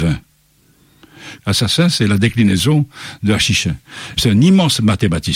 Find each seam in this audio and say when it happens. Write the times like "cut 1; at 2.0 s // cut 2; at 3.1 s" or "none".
cut 1; at 1.4 s // cut 2; at 4.2 s